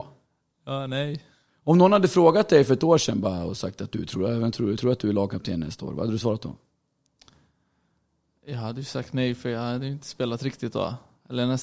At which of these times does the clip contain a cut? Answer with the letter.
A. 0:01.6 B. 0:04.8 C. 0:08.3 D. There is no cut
D